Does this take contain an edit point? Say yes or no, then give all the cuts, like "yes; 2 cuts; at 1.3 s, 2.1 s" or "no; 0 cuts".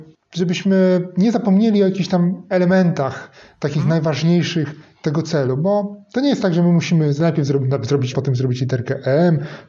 yes; 1 cut; at 8.1 s